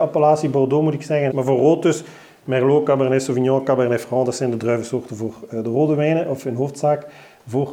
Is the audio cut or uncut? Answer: cut